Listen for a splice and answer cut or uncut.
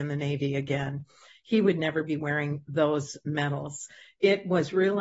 uncut